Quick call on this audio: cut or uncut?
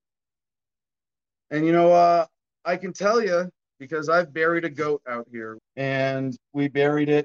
cut